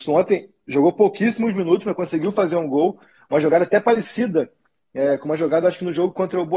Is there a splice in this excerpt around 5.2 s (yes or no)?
no